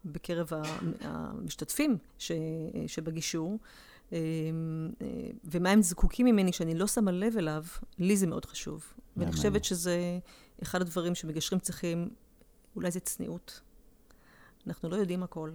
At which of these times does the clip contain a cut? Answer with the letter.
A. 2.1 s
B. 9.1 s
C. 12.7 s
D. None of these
A